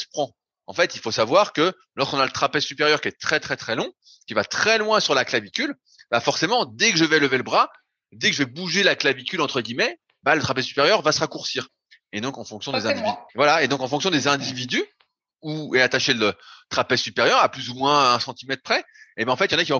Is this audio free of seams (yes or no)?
no